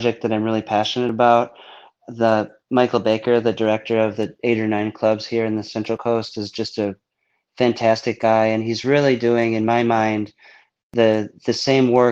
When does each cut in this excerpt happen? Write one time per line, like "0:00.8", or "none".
none